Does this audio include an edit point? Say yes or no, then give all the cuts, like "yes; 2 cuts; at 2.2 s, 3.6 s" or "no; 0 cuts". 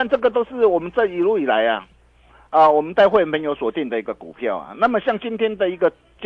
no; 0 cuts